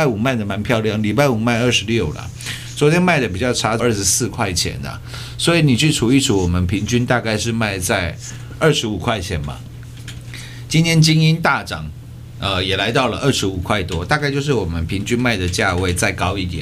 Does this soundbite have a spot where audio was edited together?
yes; 1 cut; at 3.8 s

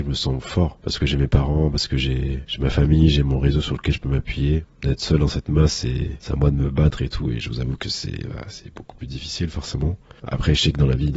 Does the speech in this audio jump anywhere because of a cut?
yes; 1 cut; at 4.7 s

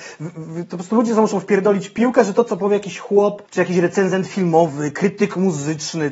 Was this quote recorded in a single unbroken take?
no; 1 cut; at 3.5 s

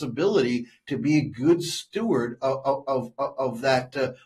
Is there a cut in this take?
no; 0 cuts

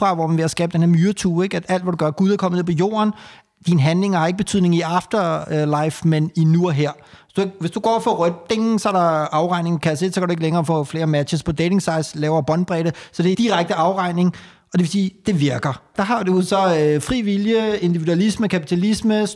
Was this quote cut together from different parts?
yes; 2 cuts; at 13.3 s, 15.9 s

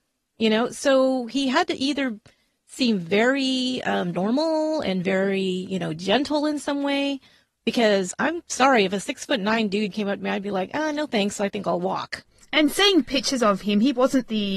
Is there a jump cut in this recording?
no; 0 cuts

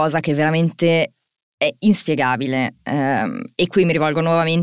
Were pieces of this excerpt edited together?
no; 0 cuts

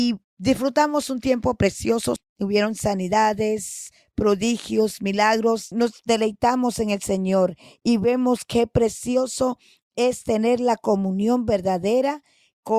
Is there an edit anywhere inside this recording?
yes; 2 cuts; at 2.2 s, 5.7 s

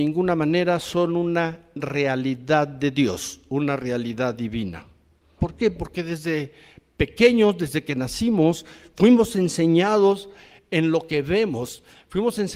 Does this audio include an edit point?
yes; 1 cut; at 5.4 s

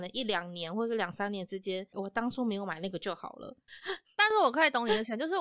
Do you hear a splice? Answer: yes; 2 cuts; at 1.9 s, 3.7 s

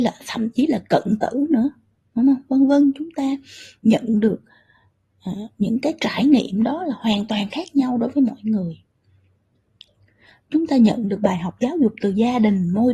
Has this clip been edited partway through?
no; 0 cuts

